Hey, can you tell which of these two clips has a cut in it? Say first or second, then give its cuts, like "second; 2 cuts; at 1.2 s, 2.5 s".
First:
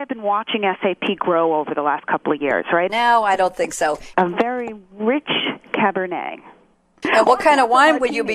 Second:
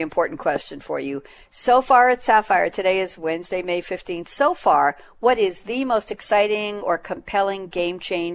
first; 3 cuts; at 2.9 s, 4.1 s, 7.0 s